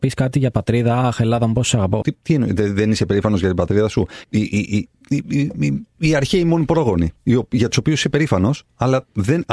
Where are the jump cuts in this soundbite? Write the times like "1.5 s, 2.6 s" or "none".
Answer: 2.0 s, 4.2 s, 5.9 s

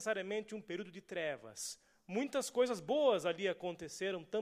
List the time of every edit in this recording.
none

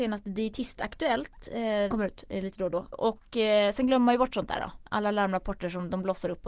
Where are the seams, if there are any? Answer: 1.9 s, 2.9 s

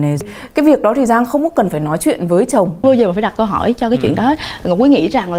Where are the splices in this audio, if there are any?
2.8 s

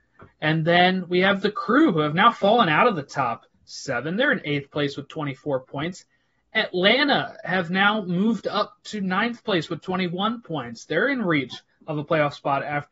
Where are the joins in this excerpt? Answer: none

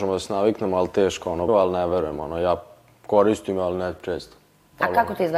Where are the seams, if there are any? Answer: 1.5 s

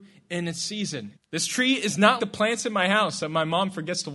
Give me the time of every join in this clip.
1.2 s, 2.2 s

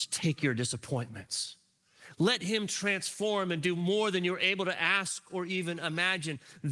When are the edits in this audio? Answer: none

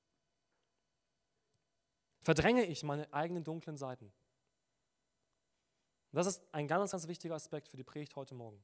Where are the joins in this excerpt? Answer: none

